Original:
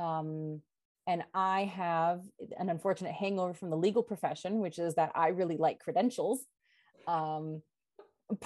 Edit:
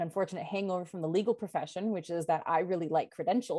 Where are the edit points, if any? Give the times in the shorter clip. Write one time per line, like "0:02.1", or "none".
none